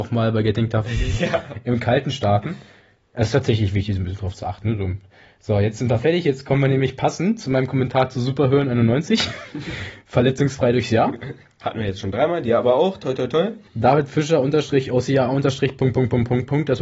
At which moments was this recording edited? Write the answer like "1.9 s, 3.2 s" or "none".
13.7 s